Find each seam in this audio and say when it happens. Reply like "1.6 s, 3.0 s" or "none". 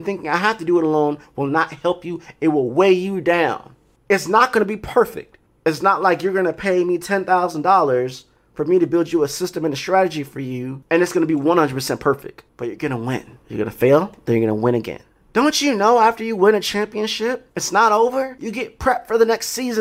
4.0 s, 12.5 s

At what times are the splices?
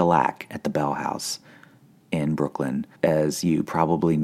2.9 s

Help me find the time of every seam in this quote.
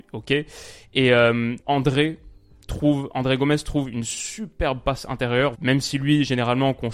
1.6 s, 5.5 s

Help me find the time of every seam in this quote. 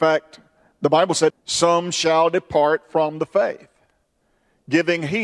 1.3 s

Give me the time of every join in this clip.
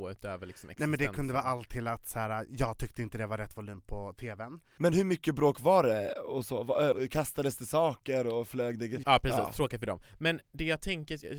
6.9 s, 9.0 s

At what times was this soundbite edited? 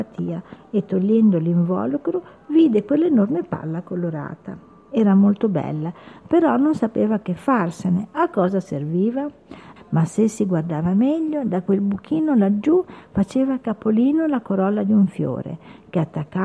9.8 s

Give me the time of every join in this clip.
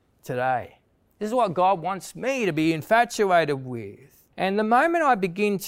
4.3 s

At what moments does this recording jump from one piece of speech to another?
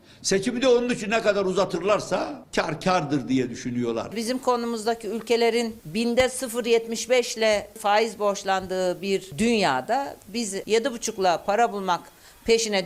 none

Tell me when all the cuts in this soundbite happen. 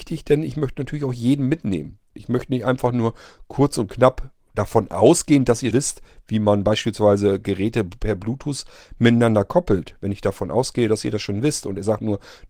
5.7 s

